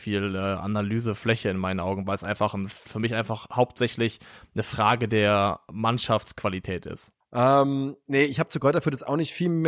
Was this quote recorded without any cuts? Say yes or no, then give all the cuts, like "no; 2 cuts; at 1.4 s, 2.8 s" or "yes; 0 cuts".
no; 2 cuts; at 2.9 s, 7.2 s